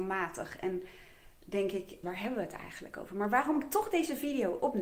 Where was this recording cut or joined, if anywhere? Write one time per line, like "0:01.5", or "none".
0:02.0